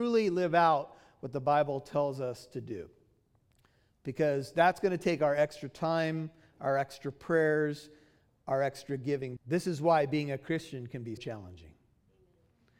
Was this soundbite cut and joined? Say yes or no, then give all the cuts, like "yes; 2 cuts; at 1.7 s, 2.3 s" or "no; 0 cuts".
yes; 2 cuts; at 9.4 s, 11.2 s